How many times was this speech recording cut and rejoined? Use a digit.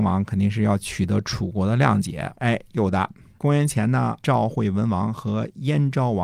2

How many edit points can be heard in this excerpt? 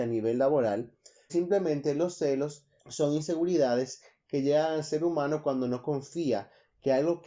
2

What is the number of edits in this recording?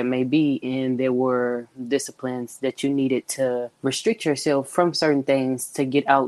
1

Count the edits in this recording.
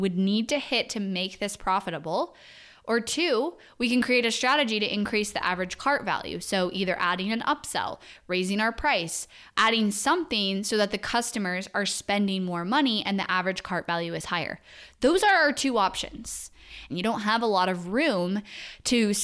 2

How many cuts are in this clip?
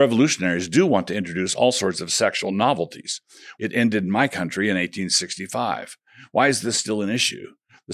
1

